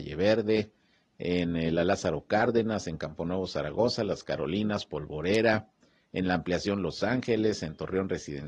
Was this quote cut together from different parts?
no; 0 cuts

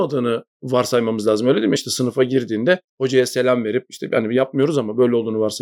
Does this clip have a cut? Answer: no; 0 cuts

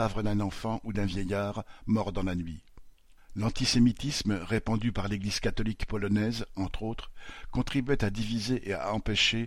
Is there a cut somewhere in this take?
yes; 1 cut; at 3.2 s

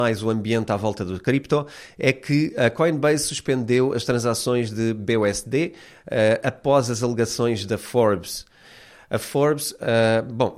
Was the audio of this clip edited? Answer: no; 0 cuts

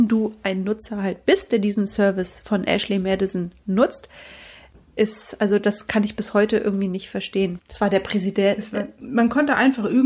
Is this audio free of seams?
no; 3 cuts; at 5.0 s, 7.6 s, 9.0 s

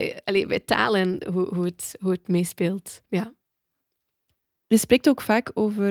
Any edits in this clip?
yes; 1 cut; at 3.0 s

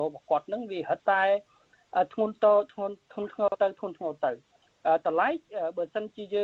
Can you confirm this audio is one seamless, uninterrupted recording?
no; 1 cut; at 1.0 s

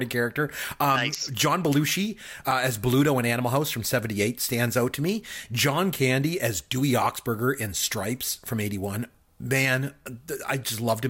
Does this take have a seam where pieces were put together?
no; 0 cuts

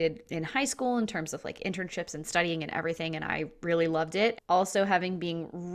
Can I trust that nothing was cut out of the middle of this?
no; 1 cut; at 4.3 s

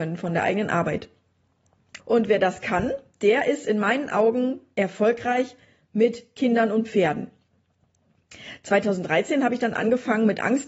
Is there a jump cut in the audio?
yes; 1 cut; at 2.0 s

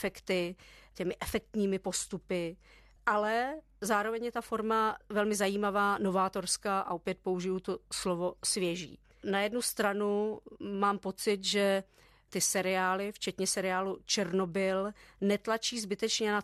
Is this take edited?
yes; 1 cut; at 9.2 s

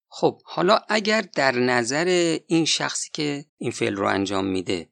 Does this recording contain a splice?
yes; 1 cut; at 3.5 s

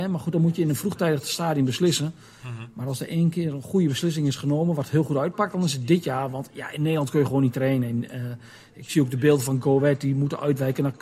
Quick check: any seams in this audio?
no; 0 cuts

